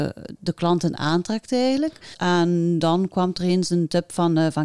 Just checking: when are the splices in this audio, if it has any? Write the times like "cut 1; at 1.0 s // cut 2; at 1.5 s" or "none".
cut 1; at 2.1 s

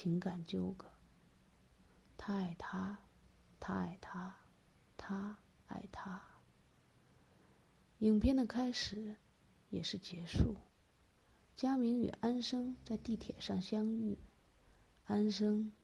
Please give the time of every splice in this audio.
none

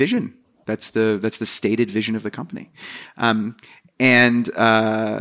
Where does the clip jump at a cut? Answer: none

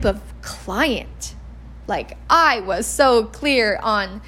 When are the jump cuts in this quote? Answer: cut 1; at 1.9 s

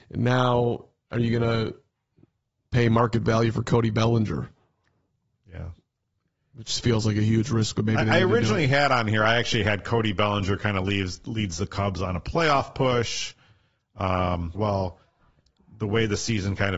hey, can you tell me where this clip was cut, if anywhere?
cut 1; at 14.6 s

